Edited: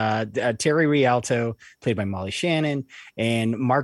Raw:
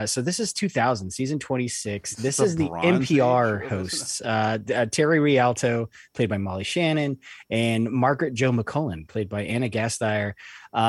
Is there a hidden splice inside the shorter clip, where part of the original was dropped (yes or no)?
no